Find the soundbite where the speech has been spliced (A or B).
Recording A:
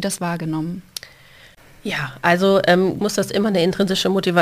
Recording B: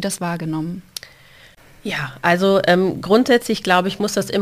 A